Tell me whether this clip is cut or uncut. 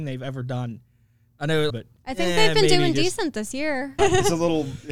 cut